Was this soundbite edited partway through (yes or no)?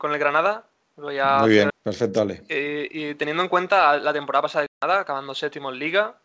yes